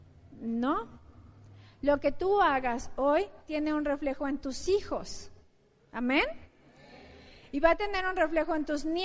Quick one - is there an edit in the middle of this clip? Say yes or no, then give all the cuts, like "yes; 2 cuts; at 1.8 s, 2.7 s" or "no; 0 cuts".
no; 0 cuts